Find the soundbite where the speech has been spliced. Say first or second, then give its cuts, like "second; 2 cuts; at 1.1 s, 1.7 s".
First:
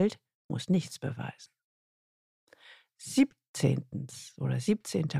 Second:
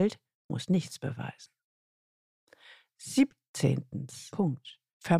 second; 1 cut; at 4.3 s